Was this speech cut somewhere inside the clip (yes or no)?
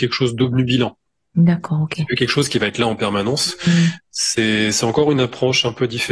no